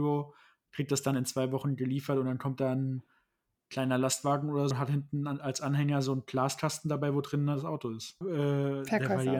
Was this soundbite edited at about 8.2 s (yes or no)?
yes